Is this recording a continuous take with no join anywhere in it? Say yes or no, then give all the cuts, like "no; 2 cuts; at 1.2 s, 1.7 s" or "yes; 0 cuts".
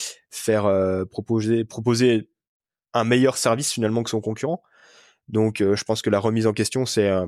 yes; 0 cuts